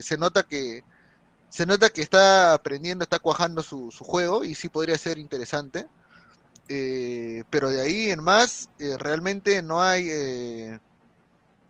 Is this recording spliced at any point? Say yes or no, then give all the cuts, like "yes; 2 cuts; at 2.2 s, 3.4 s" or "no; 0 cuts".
no; 0 cuts